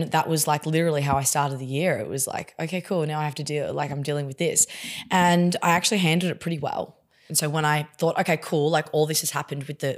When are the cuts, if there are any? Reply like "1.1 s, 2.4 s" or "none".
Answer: 7.3 s